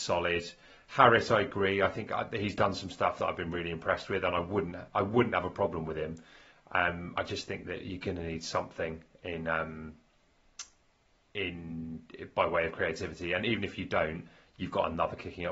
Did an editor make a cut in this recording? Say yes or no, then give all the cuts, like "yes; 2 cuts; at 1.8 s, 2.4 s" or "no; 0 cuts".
no; 0 cuts